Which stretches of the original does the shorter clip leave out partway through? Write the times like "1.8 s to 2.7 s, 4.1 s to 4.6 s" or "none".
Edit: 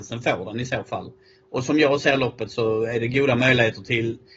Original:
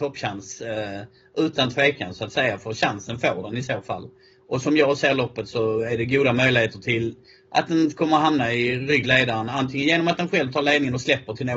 none